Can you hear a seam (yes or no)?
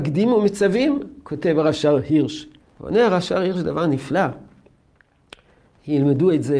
yes